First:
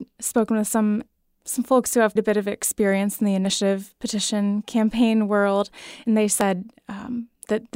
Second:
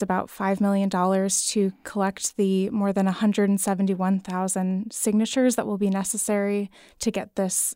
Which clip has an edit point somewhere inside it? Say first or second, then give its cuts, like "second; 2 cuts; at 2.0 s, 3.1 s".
first; 1 cut; at 2.2 s